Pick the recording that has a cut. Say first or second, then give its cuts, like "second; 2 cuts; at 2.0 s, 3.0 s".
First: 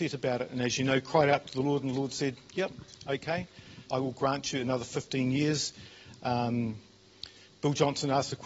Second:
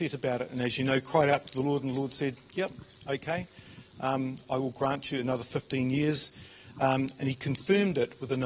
first; 2 cuts; at 3.8 s, 6.1 s